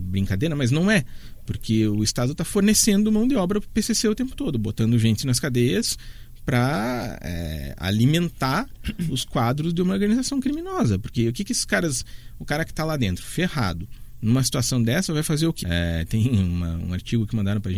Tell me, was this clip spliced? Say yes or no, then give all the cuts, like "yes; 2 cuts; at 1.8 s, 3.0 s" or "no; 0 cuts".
yes; 1 cut; at 15.6 s